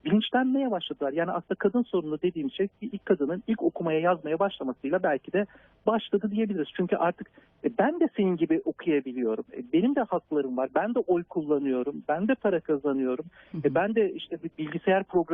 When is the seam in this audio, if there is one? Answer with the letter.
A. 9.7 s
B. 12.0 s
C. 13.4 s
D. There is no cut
D